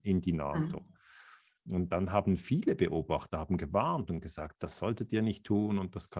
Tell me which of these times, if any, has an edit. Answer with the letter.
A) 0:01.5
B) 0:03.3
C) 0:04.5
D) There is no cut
C